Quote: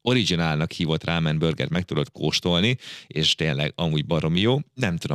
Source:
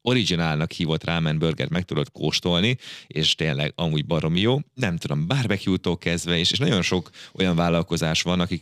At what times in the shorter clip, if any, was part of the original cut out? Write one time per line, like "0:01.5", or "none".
none